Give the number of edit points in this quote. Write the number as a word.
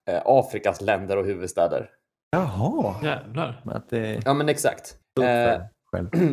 two